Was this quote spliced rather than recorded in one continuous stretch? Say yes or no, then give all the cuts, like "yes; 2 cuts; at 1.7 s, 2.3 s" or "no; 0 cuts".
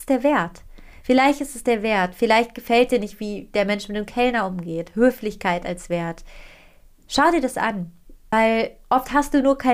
no; 0 cuts